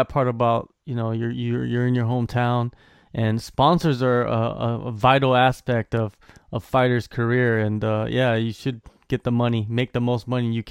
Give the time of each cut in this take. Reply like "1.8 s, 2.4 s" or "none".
none